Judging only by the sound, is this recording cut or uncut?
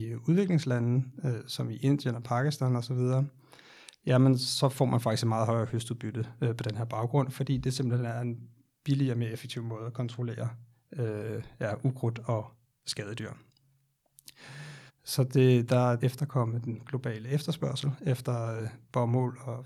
cut